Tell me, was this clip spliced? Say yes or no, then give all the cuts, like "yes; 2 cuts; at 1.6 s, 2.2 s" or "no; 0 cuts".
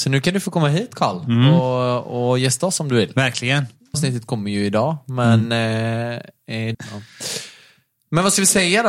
yes; 2 cuts; at 3.9 s, 6.7 s